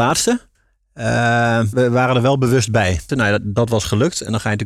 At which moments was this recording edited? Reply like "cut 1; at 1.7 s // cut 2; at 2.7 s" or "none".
cut 1; at 1.7 s // cut 2; at 3.1 s